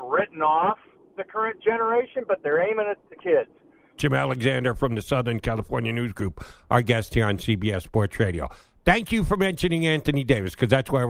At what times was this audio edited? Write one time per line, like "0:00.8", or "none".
0:04.0